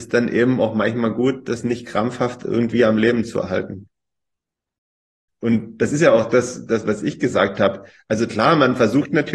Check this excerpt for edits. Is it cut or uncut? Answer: cut